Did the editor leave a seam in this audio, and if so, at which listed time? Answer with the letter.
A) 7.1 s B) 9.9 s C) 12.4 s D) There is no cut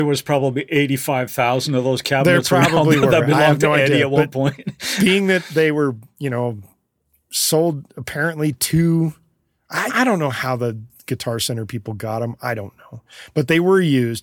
B